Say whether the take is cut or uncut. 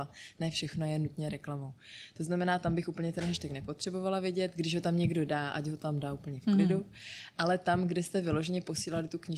uncut